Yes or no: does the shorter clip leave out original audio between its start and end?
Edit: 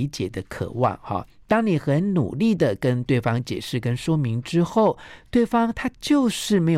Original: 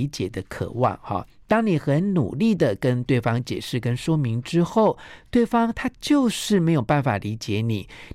no